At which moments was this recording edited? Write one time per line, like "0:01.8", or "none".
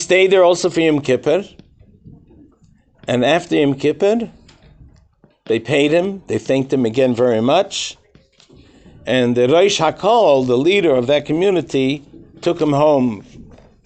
none

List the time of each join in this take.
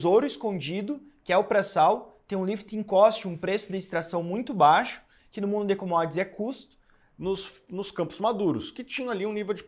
0:05.2
0:07.0

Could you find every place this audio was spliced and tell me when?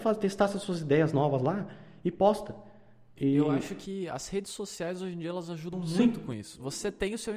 0:03.2

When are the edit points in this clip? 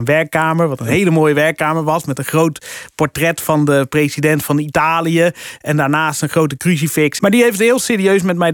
0:07.2

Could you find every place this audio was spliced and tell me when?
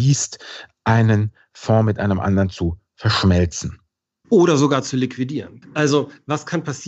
0:05.6

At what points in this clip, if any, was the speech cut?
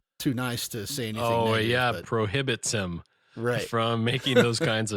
0:02.0

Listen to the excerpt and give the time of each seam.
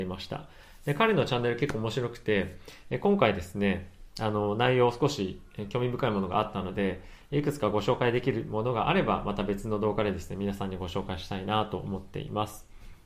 none

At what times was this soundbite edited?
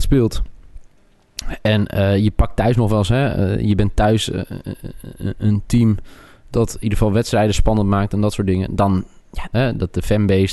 0:09.5

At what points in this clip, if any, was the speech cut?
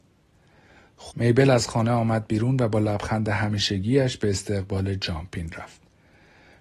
0:01.1

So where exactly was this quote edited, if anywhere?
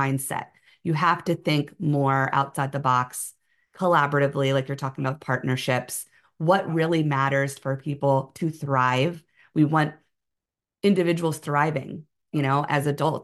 none

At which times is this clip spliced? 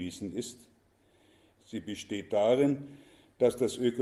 0:01.6

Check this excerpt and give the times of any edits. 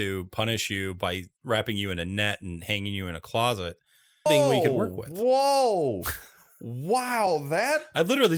0:04.3

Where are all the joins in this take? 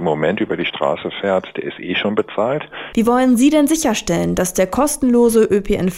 0:02.9

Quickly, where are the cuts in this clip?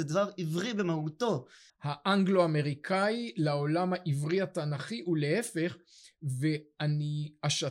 0:01.7

